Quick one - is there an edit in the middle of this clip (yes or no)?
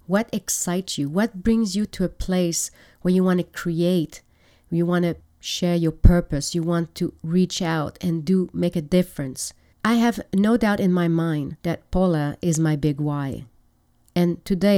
yes